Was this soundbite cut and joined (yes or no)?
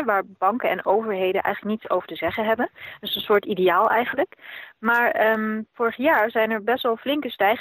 no